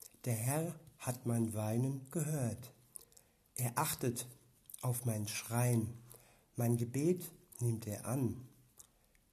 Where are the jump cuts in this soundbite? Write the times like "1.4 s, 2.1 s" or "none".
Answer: none